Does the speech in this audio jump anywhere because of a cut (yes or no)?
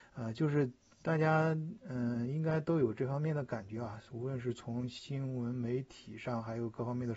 no